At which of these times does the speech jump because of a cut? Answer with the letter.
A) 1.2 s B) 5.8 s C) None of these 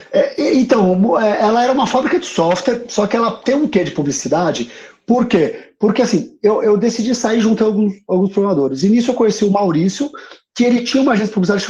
C